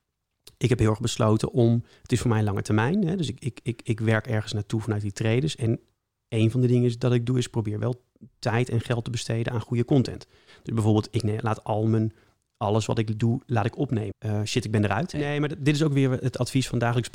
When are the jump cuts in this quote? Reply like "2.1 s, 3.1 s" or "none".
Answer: 14.1 s, 15.1 s